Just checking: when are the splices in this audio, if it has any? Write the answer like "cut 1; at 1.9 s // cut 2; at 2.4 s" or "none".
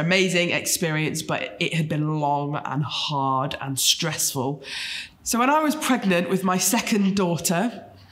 cut 1; at 5.1 s